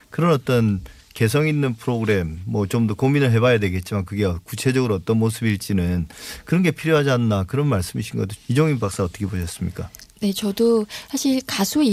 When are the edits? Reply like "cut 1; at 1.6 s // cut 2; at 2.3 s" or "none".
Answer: cut 1; at 8.4 s // cut 2; at 10.1 s

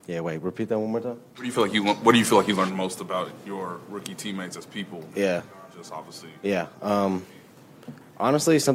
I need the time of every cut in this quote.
none

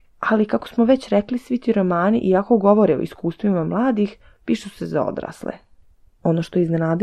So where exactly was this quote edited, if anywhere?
cut 1; at 6.1 s

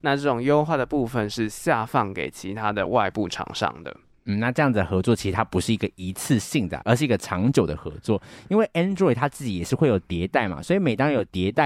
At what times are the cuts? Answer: none

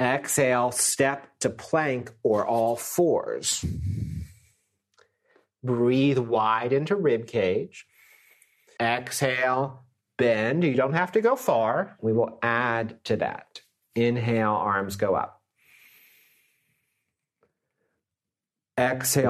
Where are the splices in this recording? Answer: cut 1; at 8.8 s // cut 2; at 12.0 s

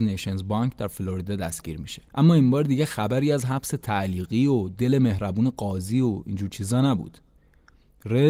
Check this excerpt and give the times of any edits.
cut 1; at 2.1 s

